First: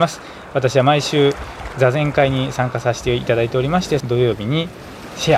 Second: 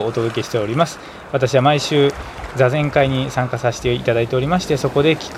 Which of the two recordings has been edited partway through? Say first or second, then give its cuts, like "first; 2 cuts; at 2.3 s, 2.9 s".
first; 1 cut; at 4.0 s